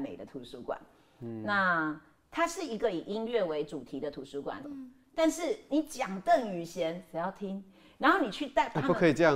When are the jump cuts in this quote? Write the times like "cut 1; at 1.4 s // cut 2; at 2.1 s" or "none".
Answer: cut 1; at 4.6 s